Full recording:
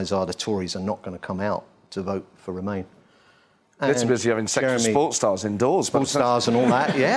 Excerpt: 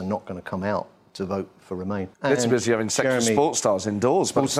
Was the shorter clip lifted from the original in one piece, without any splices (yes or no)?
no